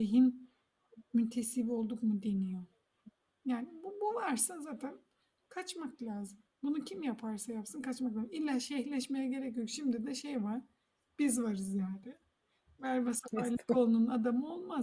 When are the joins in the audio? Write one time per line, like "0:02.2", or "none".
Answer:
none